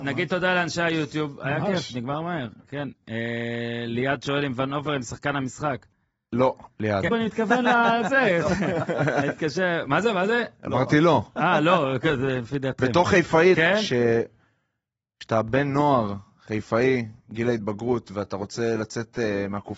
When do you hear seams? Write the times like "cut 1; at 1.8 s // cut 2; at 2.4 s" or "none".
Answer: cut 1; at 7.1 s // cut 2; at 13.5 s